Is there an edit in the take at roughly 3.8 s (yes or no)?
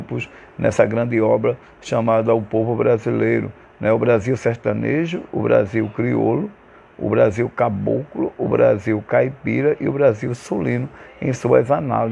no